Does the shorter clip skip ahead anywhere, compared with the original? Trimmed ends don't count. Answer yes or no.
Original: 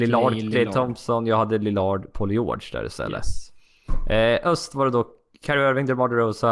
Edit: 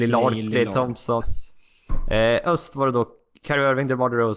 yes